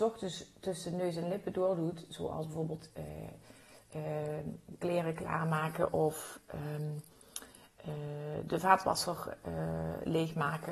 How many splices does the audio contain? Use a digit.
0